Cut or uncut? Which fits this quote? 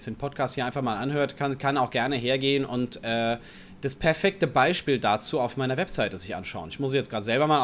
uncut